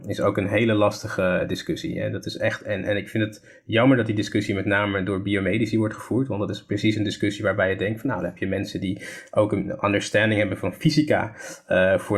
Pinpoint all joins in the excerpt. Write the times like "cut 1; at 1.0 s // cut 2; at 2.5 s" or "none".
none